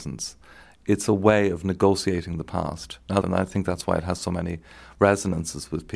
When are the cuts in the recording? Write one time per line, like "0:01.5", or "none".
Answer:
0:03.2